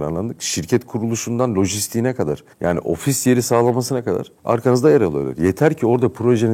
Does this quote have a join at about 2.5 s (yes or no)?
yes